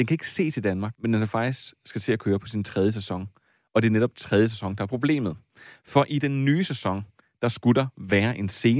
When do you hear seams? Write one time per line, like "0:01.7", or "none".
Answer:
0:00.9

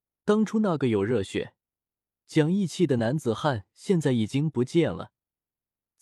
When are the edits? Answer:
none

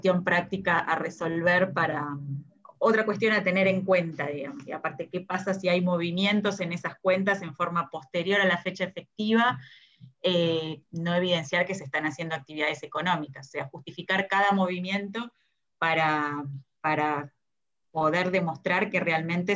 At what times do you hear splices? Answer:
0:10.8

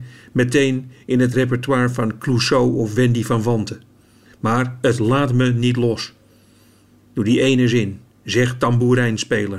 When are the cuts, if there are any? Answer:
0:04.3

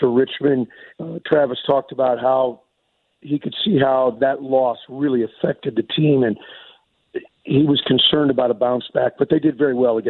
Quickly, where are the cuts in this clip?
0:00.9

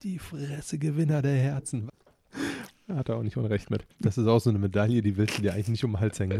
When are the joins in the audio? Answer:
0:01.9
0:03.9

